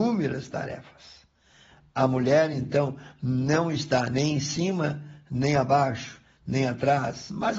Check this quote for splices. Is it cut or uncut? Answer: uncut